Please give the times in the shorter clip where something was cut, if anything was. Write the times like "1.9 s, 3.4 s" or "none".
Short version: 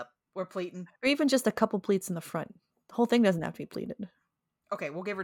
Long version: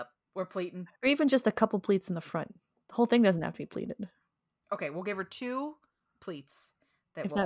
none